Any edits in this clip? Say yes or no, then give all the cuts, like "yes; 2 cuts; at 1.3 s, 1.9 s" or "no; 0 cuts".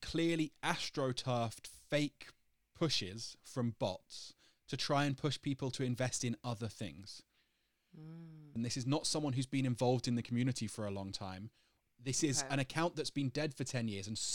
yes; 1 cut; at 8.6 s